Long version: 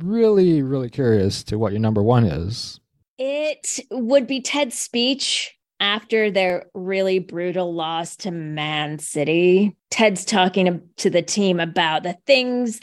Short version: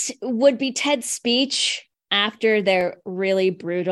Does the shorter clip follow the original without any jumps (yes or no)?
yes